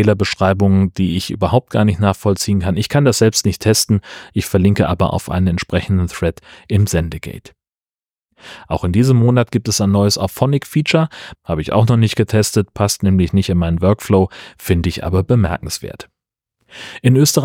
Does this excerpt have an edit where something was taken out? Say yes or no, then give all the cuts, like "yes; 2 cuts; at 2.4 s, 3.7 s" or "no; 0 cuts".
yes; 1 cut; at 11.4 s